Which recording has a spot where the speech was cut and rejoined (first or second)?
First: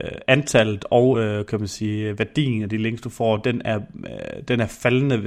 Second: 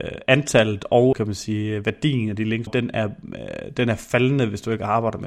second